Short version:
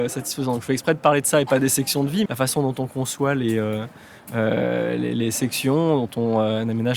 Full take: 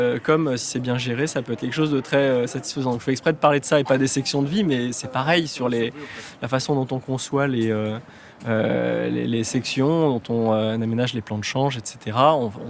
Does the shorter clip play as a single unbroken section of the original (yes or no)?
no